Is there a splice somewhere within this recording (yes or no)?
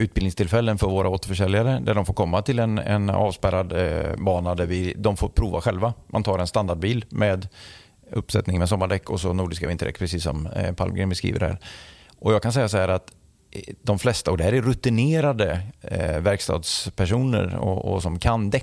no